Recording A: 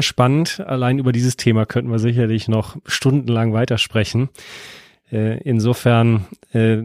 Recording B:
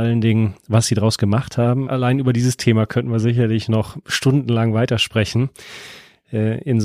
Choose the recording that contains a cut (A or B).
B